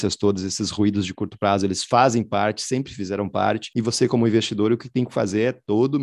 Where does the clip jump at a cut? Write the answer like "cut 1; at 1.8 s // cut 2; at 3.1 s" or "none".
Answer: none